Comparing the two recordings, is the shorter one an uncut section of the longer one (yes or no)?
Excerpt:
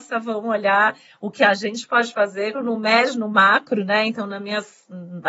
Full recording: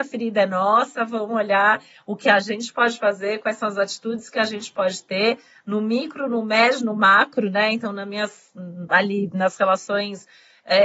no